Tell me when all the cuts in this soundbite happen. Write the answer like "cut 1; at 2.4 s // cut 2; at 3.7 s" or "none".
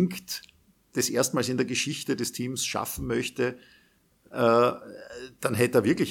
cut 1; at 4.3 s

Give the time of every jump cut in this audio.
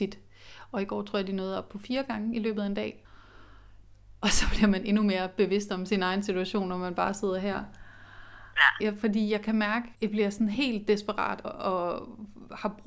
cut 1; at 8.8 s // cut 2; at 9.9 s // cut 3; at 11.4 s

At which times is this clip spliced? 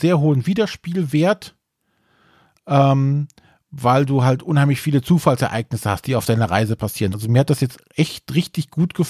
cut 1; at 7.1 s

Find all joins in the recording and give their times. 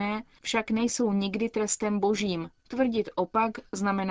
cut 1; at 2.6 s

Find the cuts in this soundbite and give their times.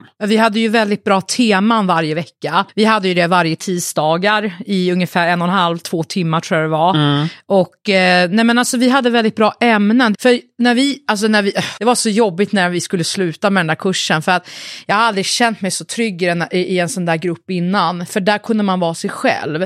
cut 1; at 10.1 s // cut 2; at 11.8 s

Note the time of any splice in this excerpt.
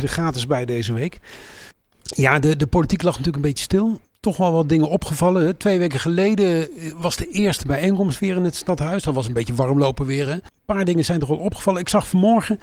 none

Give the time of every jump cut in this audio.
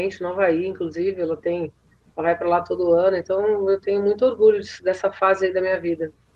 none

